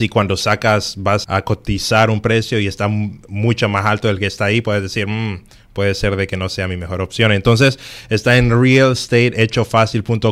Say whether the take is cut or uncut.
cut